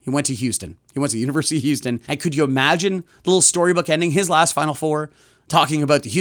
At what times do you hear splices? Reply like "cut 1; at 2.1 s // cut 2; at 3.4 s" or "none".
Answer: cut 1; at 2.1 s